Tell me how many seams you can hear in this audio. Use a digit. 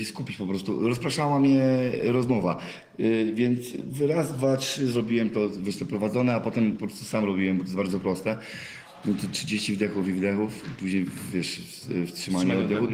0